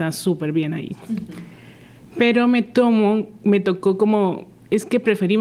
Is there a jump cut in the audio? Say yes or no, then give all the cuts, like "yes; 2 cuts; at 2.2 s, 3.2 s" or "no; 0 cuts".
no; 0 cuts